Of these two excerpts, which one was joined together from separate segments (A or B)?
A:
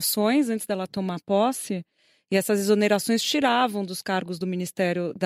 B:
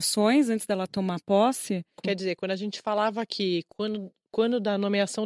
B